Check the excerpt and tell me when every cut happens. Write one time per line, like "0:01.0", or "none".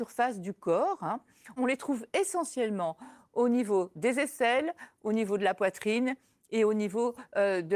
0:01.6